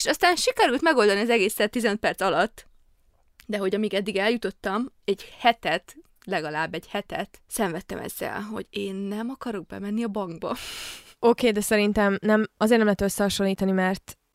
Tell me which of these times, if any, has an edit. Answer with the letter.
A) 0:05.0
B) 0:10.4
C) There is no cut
A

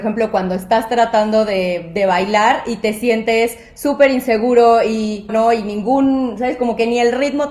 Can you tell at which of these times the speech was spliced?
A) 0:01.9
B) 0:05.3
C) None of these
B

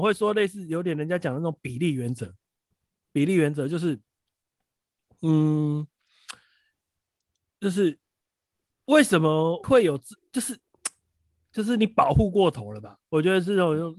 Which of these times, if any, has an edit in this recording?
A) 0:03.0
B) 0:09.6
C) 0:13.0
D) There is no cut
B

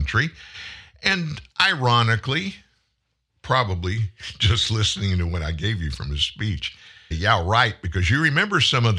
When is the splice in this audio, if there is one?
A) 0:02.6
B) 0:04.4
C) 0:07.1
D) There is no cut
C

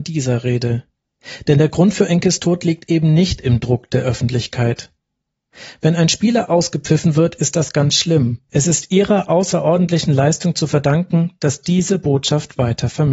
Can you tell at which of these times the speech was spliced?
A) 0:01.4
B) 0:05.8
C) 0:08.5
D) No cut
C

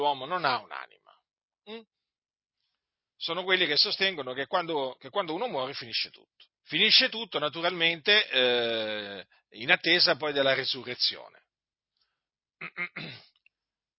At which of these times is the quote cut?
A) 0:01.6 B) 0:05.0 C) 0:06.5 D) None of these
C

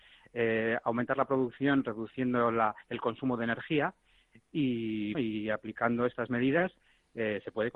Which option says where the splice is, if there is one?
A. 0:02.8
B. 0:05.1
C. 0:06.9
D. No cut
B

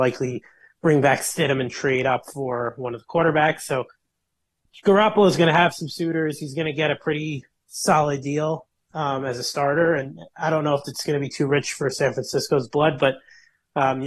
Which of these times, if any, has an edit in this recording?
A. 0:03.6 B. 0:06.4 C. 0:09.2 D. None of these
D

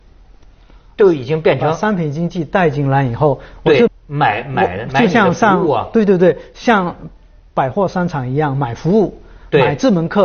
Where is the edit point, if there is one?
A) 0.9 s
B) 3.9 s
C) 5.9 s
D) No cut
B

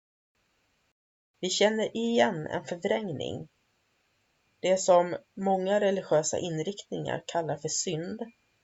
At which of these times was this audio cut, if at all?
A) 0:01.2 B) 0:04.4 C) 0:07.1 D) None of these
B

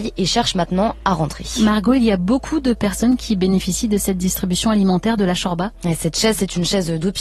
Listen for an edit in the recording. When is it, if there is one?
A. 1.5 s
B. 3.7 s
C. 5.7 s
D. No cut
C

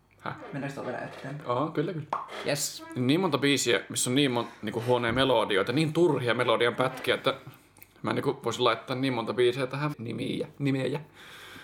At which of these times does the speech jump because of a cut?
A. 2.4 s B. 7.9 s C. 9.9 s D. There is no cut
C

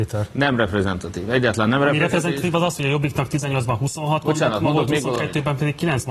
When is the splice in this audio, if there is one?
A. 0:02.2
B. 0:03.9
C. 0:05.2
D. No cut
D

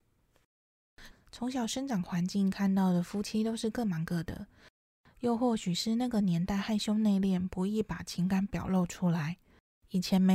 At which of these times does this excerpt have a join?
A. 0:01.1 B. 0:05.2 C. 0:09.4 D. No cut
A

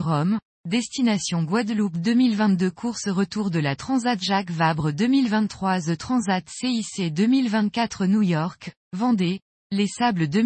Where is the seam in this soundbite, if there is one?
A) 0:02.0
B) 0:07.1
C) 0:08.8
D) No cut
D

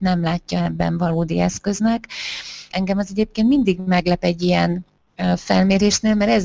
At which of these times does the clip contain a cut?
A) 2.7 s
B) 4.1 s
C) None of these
A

